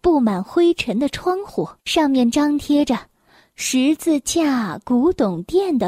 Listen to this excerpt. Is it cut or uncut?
cut